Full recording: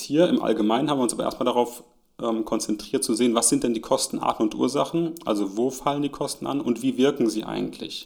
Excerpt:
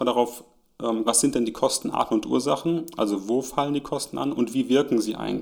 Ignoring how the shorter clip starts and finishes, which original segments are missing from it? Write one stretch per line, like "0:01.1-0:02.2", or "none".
0:02.4-0:03.3